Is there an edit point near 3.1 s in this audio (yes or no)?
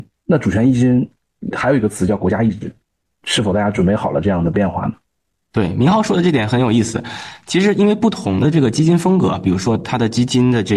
yes